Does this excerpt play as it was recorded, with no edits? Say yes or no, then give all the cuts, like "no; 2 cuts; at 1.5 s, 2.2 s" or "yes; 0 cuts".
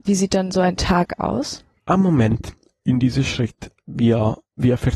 yes; 0 cuts